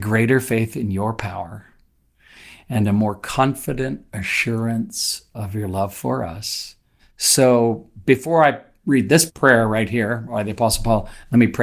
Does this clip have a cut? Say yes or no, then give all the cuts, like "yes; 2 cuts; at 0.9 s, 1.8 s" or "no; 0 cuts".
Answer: yes; 2 cuts; at 7.0 s, 9.3 s